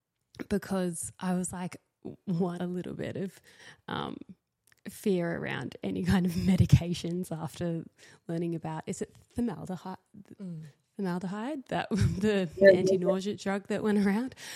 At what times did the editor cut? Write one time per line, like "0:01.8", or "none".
0:02.6